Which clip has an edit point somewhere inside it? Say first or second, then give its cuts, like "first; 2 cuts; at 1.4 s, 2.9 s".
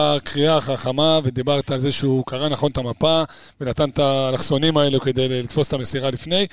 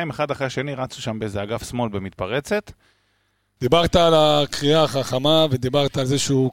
second; 1 cut; at 3.6 s